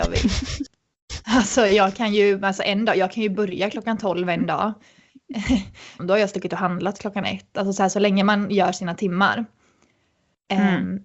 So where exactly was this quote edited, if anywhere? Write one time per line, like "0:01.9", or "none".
0:06.0